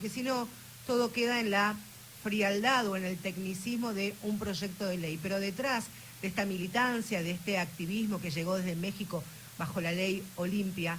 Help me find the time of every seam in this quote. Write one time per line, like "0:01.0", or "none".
none